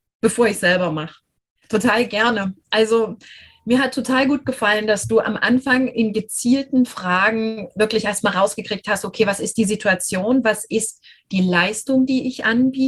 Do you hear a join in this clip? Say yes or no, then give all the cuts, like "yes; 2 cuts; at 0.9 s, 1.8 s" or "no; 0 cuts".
yes; 1 cut; at 1.6 s